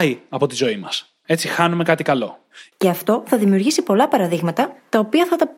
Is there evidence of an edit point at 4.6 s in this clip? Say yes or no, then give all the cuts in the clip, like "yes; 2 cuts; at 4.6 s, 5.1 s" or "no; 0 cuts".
no; 2 cuts; at 1.2 s, 2.7 s